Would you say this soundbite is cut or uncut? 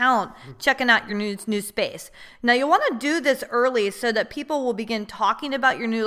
uncut